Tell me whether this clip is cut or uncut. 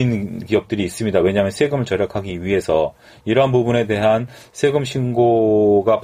uncut